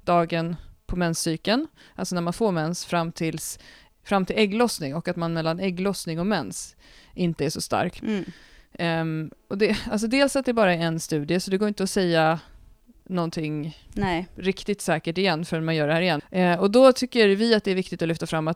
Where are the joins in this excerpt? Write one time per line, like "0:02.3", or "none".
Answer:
0:08.0
0:16.2